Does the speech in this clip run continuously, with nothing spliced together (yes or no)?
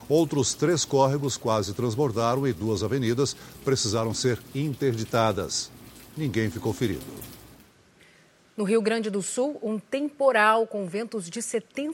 yes